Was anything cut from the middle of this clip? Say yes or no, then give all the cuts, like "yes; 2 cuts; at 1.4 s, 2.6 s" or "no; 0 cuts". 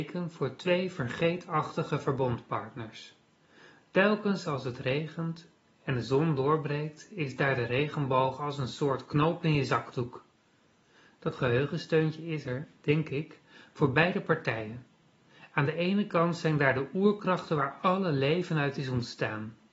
no; 0 cuts